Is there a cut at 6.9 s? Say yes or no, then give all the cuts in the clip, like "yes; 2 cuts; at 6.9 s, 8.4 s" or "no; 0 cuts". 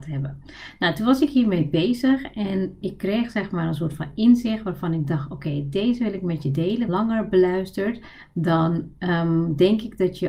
yes; 2 cuts; at 2.8 s, 6.9 s